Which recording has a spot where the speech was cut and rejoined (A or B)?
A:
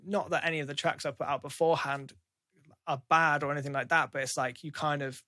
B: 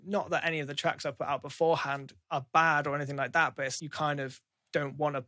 B